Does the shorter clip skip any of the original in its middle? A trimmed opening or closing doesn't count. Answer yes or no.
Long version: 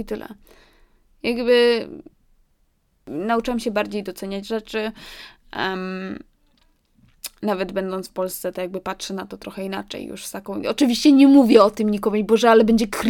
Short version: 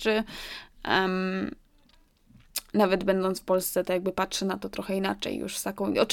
no